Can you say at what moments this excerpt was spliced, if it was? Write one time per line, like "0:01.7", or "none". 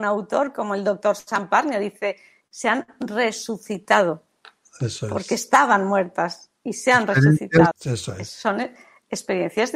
0:07.7